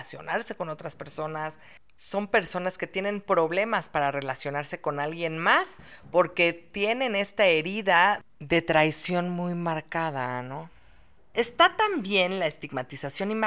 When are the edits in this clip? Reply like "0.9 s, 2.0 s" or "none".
none